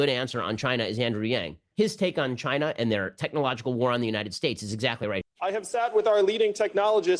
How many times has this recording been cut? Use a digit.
2